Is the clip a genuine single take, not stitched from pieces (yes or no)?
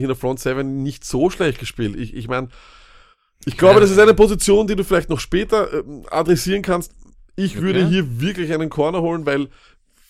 yes